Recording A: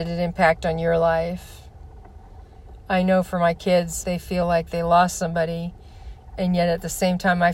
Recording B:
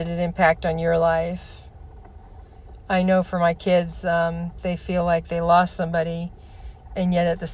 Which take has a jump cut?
A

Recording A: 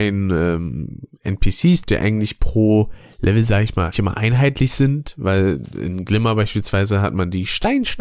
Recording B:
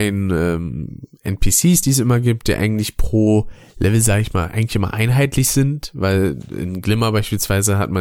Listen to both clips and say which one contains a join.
A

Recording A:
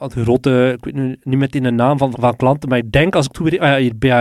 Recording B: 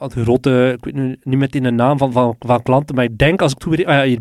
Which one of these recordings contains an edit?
A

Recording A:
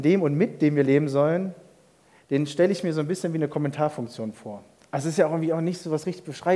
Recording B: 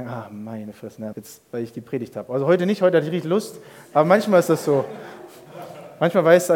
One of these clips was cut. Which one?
B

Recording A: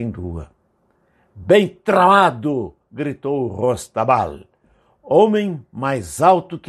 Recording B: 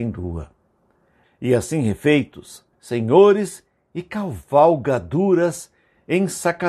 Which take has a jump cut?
B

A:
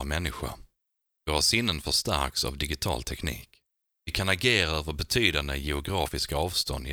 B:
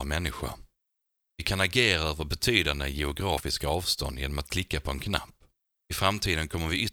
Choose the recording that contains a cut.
B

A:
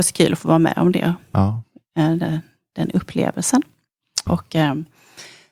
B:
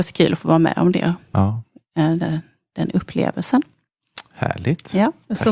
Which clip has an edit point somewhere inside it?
A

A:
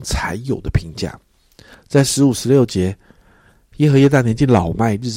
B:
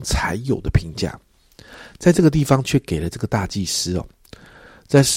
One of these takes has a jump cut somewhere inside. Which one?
A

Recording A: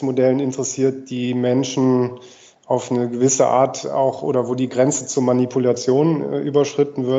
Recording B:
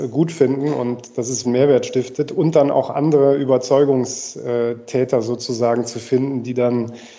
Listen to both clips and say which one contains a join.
B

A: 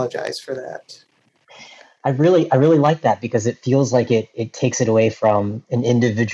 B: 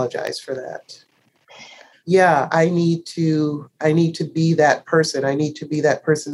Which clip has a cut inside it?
B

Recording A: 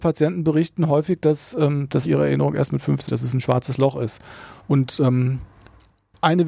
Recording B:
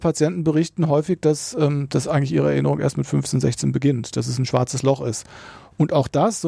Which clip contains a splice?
A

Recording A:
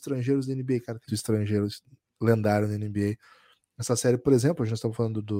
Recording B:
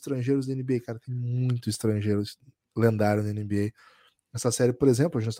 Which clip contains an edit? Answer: A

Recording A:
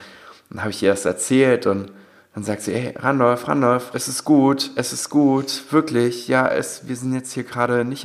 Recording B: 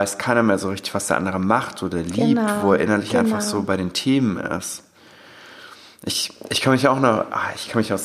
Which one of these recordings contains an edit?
A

